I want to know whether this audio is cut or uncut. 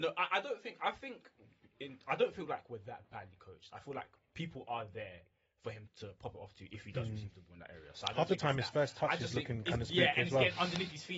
cut